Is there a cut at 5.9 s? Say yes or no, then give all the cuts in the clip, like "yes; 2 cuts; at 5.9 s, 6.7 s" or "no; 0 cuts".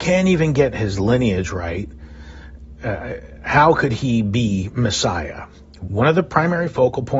yes; 1 cut; at 5.9 s